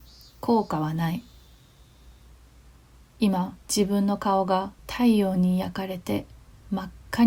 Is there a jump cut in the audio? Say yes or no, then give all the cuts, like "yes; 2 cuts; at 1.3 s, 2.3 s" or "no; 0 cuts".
yes; 2 cuts; at 3.6 s, 4.8 s